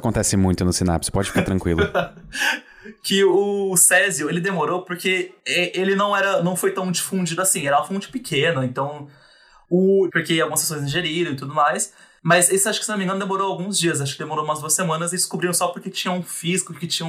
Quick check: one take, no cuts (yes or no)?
no